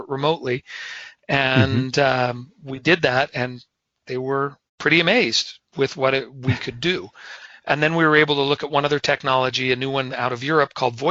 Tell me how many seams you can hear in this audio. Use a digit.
1